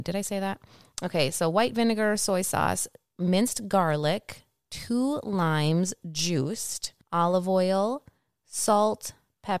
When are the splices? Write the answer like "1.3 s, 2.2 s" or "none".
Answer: 7.0 s